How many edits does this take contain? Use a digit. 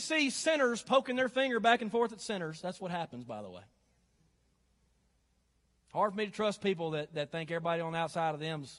0